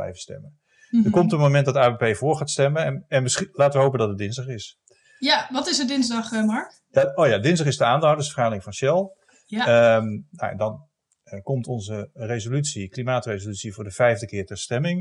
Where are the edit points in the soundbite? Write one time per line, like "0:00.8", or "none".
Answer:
none